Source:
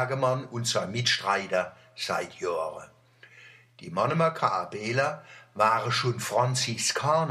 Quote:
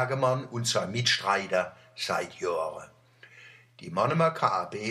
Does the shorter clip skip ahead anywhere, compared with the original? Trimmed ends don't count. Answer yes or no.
no